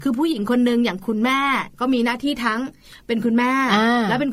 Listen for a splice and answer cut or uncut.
uncut